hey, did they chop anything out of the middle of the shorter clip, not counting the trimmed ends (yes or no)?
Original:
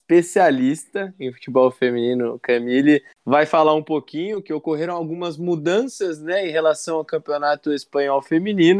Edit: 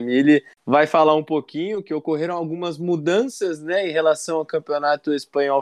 no